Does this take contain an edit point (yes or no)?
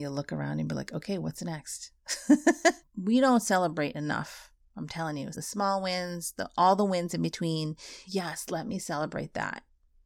yes